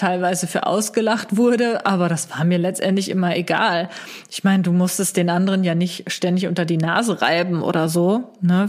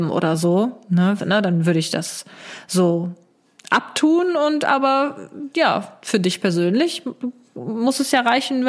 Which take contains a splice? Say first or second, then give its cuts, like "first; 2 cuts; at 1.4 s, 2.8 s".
second; 1 cut; at 1.2 s